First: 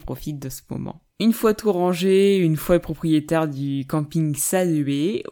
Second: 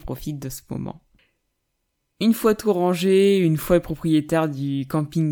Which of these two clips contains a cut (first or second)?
first